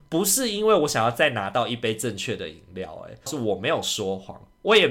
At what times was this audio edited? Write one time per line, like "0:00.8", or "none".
0:03.3